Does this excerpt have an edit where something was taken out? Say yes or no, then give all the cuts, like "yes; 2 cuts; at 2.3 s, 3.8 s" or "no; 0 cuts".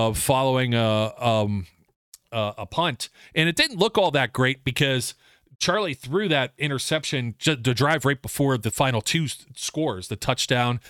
no; 0 cuts